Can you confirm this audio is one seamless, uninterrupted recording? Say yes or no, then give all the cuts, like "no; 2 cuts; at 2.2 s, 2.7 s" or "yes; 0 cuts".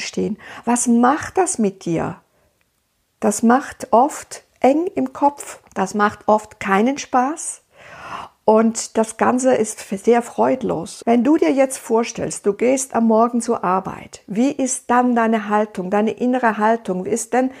no; 2 cuts; at 5.7 s, 11.0 s